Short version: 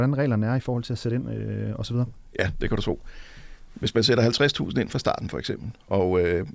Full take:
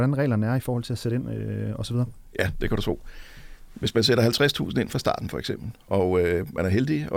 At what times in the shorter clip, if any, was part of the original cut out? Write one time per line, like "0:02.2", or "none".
none